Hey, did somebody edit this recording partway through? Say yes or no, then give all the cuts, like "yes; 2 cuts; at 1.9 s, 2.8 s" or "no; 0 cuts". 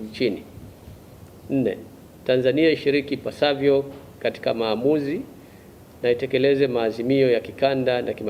no; 0 cuts